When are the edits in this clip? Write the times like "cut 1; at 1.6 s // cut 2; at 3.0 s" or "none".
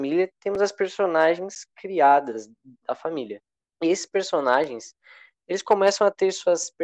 cut 1; at 3.7 s